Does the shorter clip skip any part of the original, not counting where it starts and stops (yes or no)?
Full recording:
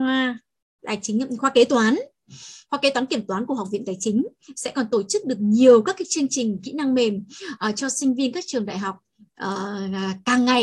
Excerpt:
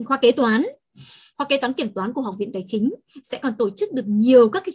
no